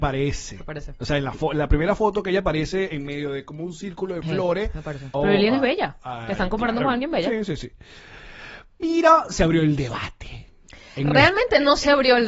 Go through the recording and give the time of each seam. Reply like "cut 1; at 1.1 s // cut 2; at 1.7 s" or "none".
cut 1; at 5.1 s